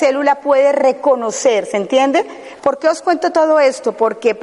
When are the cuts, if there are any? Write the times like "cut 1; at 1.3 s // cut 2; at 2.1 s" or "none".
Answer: cut 1; at 2.6 s